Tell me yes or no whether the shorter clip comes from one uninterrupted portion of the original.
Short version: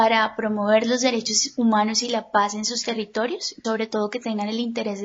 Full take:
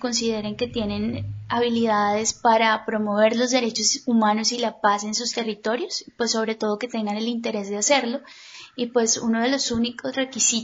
no